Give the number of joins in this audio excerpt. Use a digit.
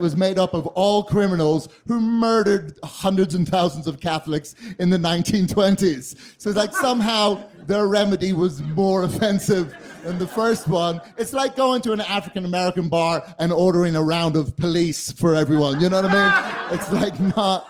0